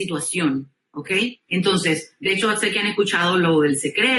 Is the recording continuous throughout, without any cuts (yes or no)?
no